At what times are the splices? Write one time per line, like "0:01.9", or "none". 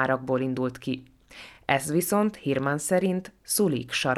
none